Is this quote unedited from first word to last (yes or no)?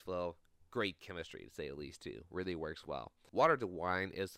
yes